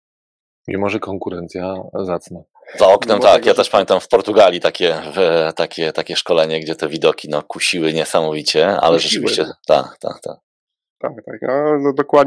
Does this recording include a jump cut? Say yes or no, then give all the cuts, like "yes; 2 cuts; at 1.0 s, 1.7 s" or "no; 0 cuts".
no; 0 cuts